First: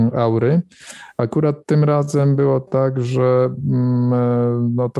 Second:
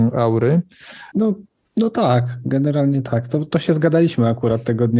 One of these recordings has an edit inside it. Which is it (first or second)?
second